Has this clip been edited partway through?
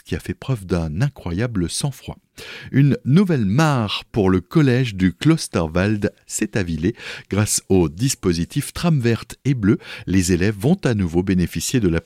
no; 0 cuts

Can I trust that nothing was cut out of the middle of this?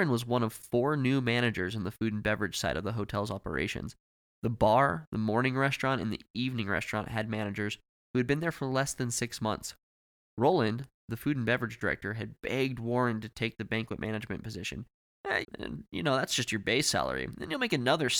no; 1 cut; at 15.4 s

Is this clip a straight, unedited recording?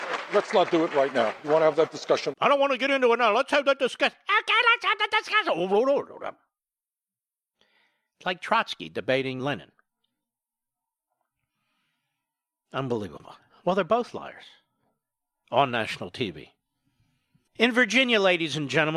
no; 3 cuts; at 2.3 s, 9.4 s, 17.5 s

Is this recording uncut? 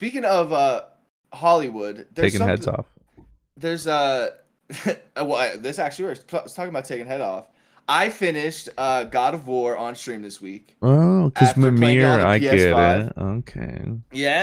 yes; 0 cuts

